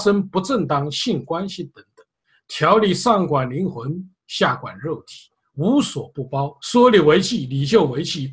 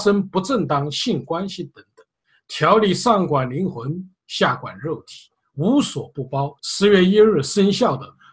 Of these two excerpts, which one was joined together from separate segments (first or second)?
second